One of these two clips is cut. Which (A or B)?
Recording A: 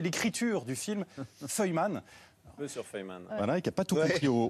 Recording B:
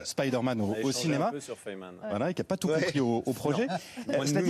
A